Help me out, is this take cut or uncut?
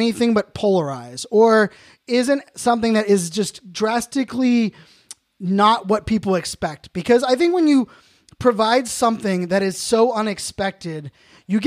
uncut